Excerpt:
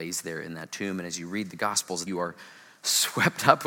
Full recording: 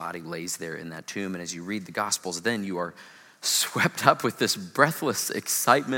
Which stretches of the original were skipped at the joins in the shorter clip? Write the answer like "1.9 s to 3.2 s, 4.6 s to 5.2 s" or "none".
2.4 s to 2.7 s